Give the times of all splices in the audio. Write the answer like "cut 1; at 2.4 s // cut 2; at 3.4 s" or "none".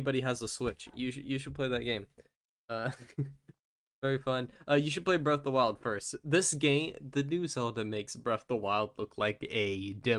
none